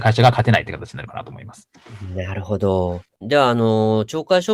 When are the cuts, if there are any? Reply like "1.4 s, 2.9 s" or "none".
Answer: 3.2 s